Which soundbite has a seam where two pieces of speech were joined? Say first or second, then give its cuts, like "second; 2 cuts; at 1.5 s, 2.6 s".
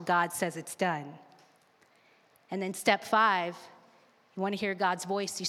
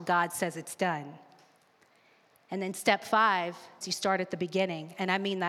second; 1 cut; at 3.8 s